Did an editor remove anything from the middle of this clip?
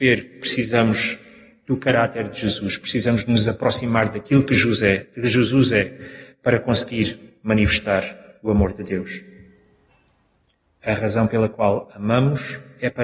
no; 0 cuts

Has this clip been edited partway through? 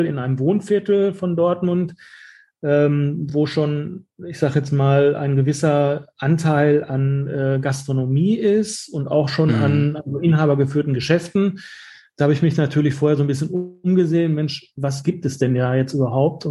no; 0 cuts

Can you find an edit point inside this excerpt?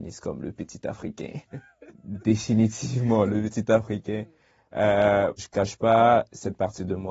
yes; 2 cuts; at 1.5 s, 5.4 s

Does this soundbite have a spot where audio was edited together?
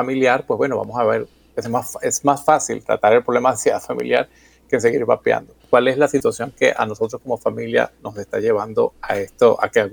yes; 2 cuts; at 5.6 s, 8.9 s

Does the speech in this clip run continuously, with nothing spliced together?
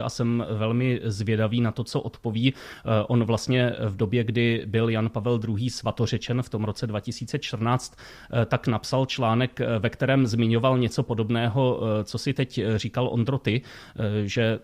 yes; 0 cuts

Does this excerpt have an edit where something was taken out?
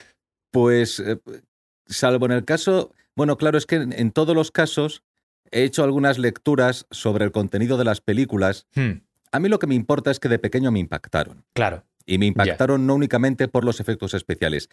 no; 0 cuts

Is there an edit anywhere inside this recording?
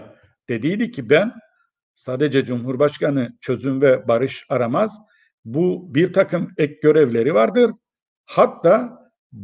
no; 0 cuts

